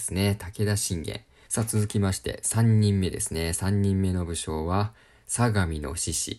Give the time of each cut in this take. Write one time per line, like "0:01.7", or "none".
0:01.5